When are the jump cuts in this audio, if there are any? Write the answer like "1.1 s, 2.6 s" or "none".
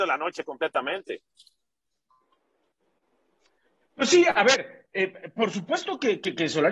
none